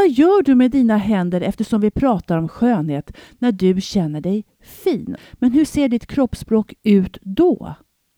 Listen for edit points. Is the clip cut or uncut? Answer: cut